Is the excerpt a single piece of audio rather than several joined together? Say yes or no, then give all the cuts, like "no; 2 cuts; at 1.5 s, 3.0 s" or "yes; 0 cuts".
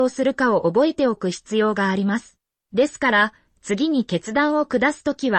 no; 1 cut; at 2.6 s